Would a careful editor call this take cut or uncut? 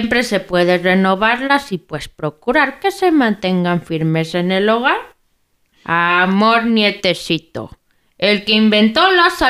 cut